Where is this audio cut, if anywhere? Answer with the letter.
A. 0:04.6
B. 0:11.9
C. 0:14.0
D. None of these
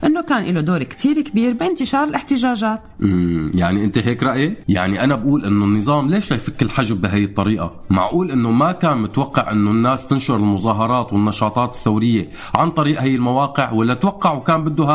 A